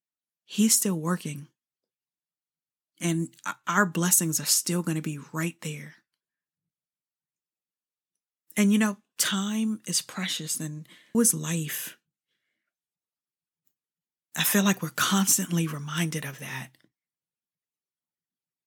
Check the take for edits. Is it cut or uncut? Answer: cut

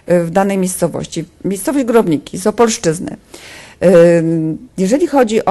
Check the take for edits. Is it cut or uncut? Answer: uncut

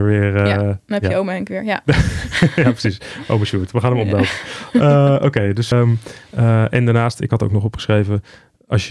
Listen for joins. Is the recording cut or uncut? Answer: cut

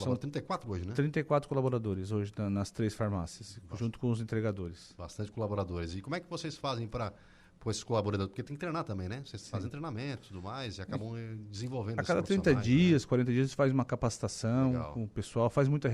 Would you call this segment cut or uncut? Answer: uncut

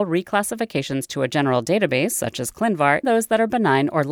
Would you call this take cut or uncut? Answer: cut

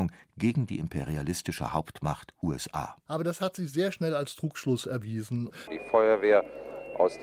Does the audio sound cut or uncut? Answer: cut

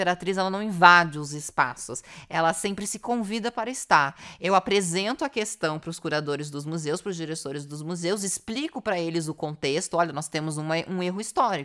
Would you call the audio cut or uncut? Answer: uncut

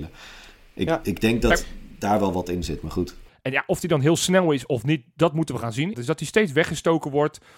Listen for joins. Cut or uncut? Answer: cut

